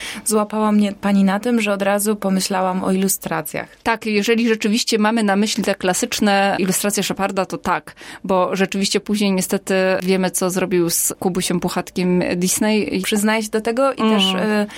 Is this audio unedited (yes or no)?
no